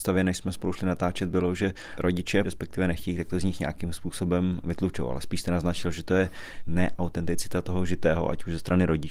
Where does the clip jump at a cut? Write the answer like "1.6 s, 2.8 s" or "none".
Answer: 2.4 s